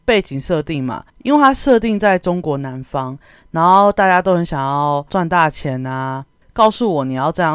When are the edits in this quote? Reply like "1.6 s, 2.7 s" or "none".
1.1 s, 6.4 s